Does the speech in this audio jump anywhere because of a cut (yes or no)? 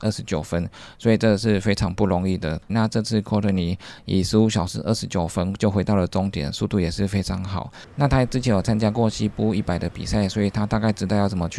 yes